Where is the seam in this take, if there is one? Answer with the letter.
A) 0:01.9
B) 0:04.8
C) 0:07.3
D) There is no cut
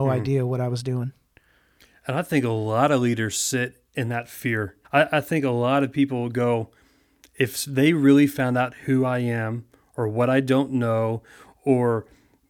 B